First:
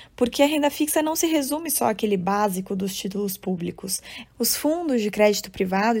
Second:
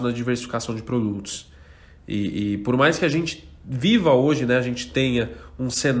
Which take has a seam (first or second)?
first